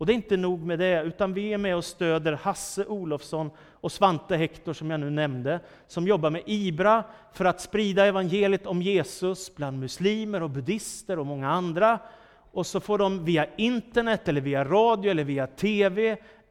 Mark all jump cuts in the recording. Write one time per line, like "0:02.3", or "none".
none